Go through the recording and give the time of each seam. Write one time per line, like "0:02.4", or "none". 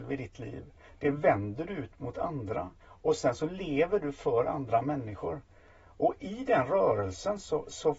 0:02.8